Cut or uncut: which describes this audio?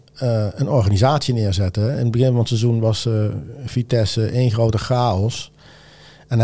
uncut